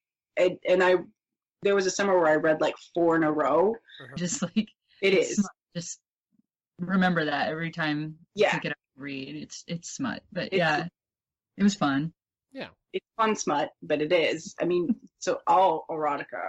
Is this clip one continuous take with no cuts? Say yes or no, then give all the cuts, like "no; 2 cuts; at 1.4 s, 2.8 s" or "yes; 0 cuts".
no; 1 cut; at 4.2 s